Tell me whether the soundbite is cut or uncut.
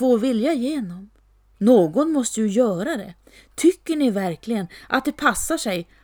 cut